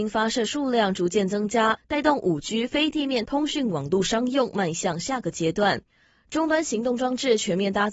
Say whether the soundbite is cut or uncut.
cut